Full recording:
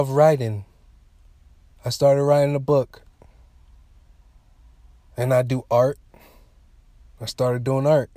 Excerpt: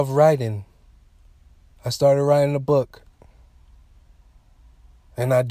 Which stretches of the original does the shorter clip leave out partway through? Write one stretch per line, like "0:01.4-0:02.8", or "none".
none